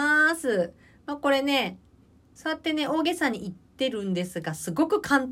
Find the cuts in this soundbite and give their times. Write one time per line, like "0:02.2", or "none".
none